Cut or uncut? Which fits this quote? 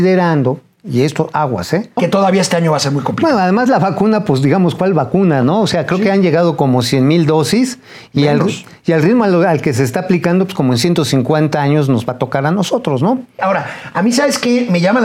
cut